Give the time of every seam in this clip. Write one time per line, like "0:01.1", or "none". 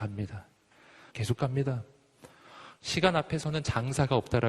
0:01.1